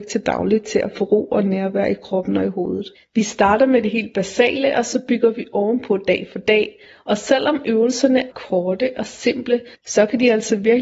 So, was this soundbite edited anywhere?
yes; 1 cut; at 8.3 s

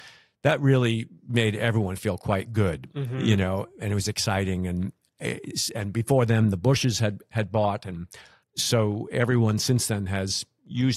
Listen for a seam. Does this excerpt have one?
yes; 1 cut; at 8.4 s

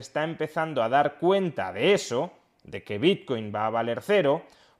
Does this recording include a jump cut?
no; 0 cuts

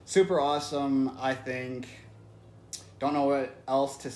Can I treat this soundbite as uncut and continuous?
yes; 0 cuts

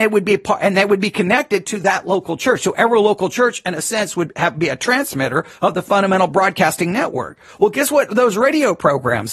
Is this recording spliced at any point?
no; 0 cuts

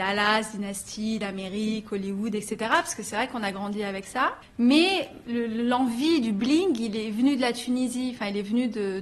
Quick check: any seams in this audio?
no; 0 cuts

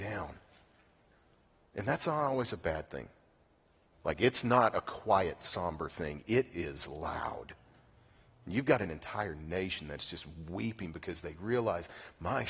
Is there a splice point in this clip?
yes; 1 cut; at 3.9 s

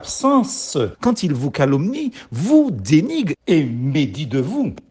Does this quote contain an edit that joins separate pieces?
yes; 1 cut; at 3.4 s

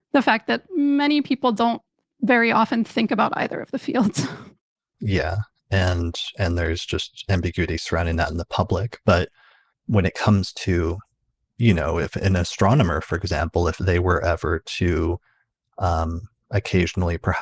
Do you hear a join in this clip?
no; 0 cuts

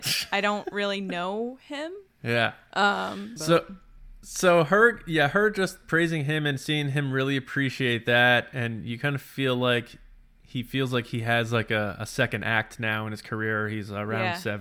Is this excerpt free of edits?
no; 1 cut; at 3.4 s

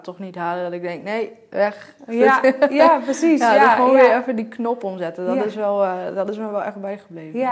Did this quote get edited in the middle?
no; 0 cuts

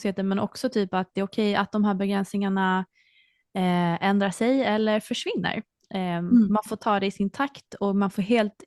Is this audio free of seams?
yes; 0 cuts

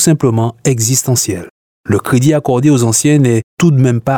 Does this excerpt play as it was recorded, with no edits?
no; 1 cut; at 1.7 s

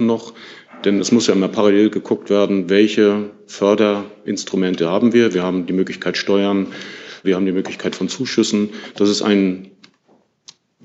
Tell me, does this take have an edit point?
yes; 1 cut; at 7.2 s

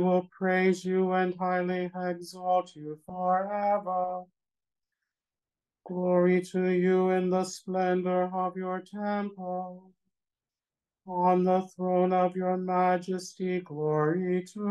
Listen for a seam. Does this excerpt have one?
no; 0 cuts

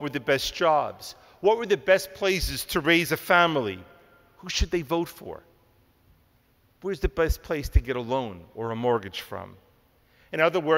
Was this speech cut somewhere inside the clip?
no; 0 cuts

